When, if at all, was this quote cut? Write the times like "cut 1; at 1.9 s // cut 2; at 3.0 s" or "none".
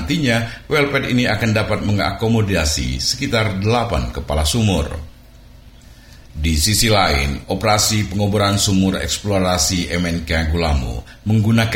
cut 1; at 6.2 s